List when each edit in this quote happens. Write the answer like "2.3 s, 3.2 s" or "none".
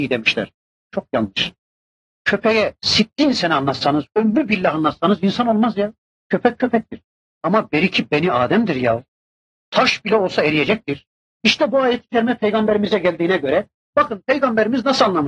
11.2 s